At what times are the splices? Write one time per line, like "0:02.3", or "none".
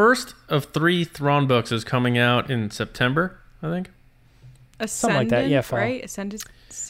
none